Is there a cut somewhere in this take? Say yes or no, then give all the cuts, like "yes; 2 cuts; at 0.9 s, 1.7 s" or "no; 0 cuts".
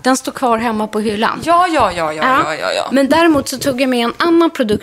no; 0 cuts